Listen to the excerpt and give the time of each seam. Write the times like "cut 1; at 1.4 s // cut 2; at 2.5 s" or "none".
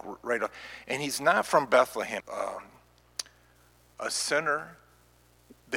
cut 1; at 2.2 s